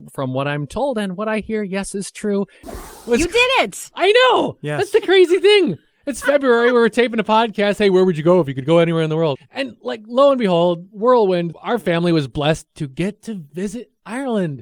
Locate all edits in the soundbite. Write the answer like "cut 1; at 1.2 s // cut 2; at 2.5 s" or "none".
cut 1; at 2.6 s // cut 2; at 9.4 s // cut 3; at 11.5 s